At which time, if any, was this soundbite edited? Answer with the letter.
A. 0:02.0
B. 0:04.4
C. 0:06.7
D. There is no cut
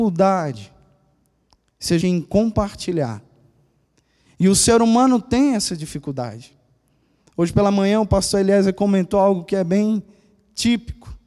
A